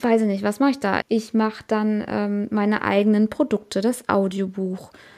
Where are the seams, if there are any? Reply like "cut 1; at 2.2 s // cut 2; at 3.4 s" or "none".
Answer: cut 1; at 1.0 s